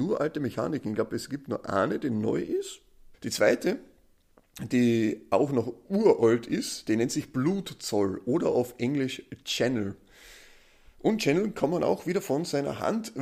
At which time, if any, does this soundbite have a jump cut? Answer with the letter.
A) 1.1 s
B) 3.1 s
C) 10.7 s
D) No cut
B